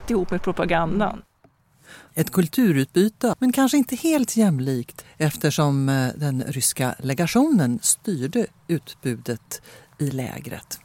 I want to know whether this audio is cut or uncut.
cut